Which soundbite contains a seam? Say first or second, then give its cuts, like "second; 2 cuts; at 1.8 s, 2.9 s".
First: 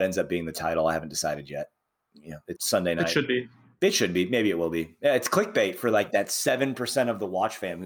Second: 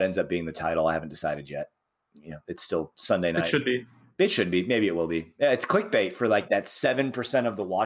first; 1 cut; at 2.6 s